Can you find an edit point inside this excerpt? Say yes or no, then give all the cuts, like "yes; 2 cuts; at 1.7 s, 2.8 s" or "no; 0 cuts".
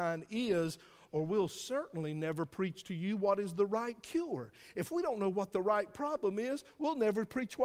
no; 0 cuts